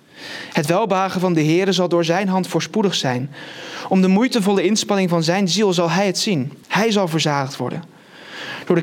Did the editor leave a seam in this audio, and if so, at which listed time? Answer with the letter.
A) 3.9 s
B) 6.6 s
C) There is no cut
B